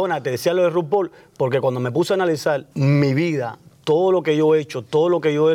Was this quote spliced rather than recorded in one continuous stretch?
yes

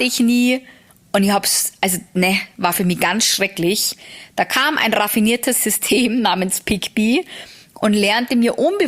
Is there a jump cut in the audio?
no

